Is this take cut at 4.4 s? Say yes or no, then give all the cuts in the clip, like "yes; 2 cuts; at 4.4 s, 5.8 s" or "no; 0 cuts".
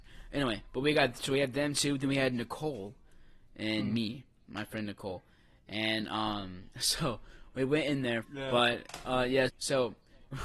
no; 2 cuts; at 8.2 s, 9.5 s